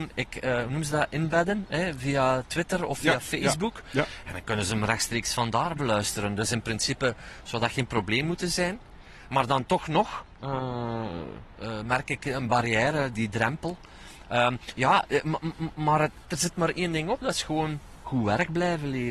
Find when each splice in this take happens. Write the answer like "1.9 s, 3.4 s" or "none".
13.1 s, 16.2 s